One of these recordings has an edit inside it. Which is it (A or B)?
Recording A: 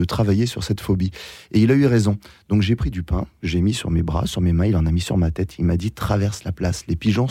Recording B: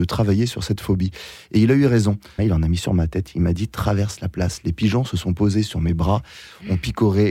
B